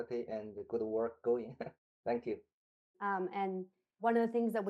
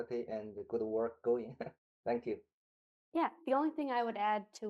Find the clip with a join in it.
first; 1 cut; at 2.9 s

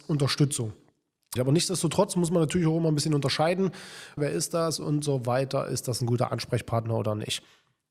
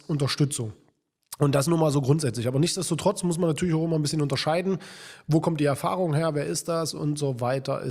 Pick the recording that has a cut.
first; 2 cuts; at 1.4 s, 4.2 s

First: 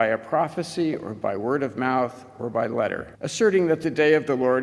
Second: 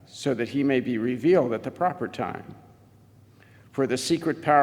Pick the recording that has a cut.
first; 1 cut; at 3.1 s

